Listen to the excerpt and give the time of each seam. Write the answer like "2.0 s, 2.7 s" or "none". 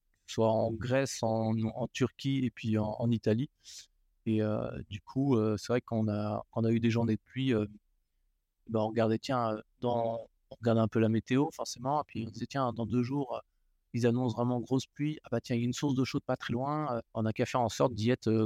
17.1 s

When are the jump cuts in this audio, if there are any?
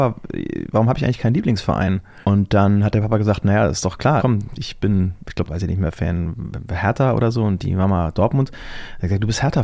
2.2 s, 4.2 s, 5.5 s

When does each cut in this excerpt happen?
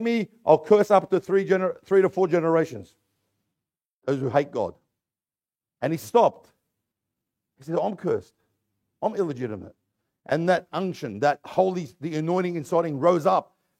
none

